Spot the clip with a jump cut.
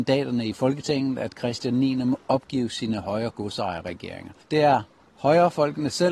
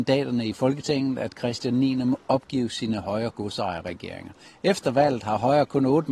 first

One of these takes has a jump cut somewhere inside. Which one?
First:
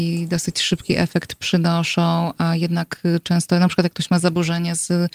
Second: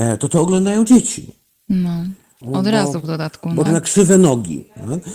second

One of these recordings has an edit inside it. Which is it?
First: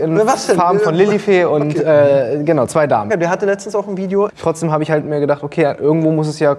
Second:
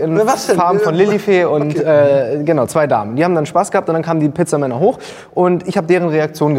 first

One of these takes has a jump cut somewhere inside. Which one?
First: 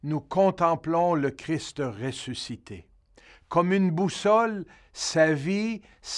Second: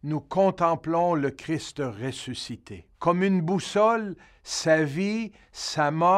second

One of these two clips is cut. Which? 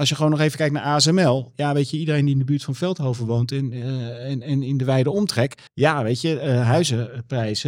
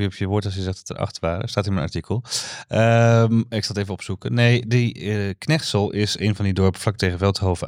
first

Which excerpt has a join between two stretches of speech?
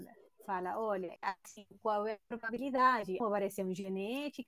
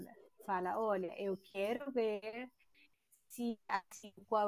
first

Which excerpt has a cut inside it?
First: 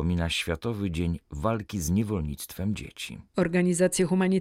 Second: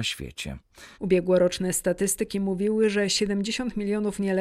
second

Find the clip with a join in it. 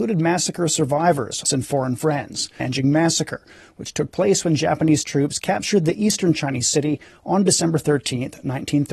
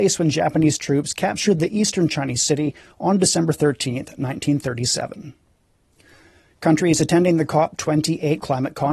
first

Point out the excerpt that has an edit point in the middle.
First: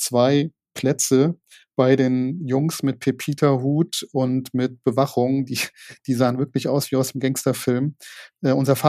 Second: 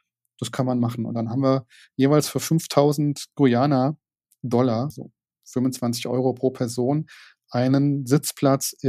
second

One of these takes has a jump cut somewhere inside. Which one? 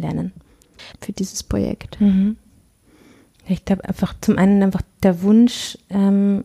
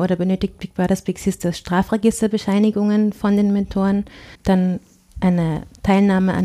first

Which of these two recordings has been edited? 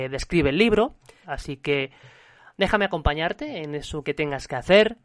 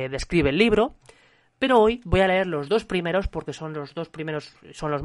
first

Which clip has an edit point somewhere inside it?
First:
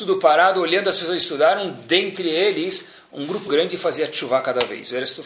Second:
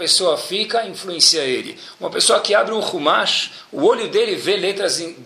first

